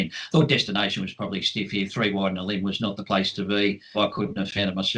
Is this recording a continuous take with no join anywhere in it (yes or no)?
no